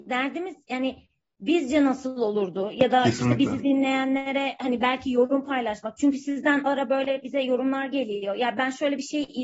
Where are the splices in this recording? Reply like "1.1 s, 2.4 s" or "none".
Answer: 6.7 s